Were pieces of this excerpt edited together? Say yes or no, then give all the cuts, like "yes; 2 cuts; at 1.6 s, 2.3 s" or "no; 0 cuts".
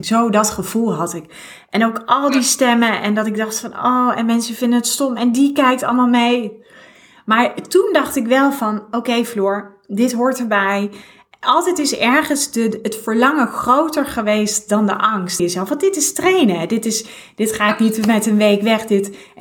yes; 1 cut; at 15.4 s